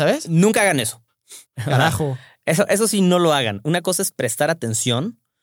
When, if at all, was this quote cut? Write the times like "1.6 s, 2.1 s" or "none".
1.5 s